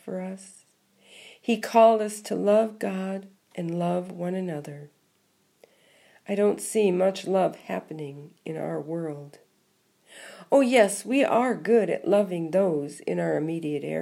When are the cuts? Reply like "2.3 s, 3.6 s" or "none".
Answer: none